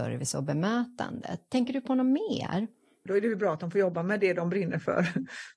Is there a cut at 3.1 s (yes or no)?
yes